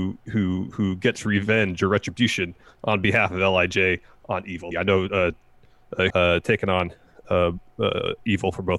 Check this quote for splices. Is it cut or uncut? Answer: cut